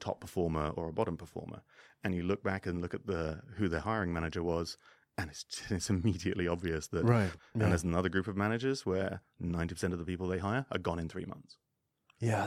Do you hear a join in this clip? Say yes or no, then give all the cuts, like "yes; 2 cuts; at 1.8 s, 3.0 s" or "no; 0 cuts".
yes; 1 cut; at 7.4 s